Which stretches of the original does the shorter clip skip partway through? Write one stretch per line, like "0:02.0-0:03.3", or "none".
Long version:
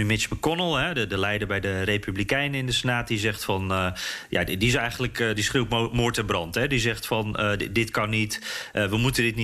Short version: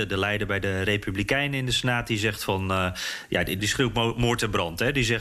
0:04.6-0:05.3